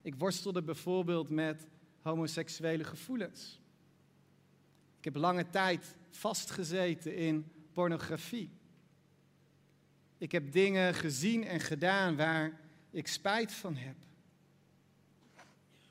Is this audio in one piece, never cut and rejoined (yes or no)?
yes